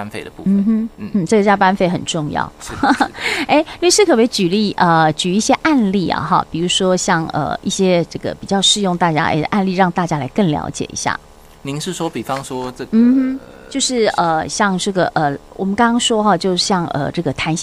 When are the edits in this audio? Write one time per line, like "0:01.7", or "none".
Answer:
none